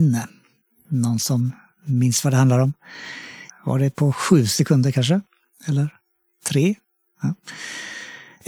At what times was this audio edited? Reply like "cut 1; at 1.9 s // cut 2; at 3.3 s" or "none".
cut 1; at 3.5 s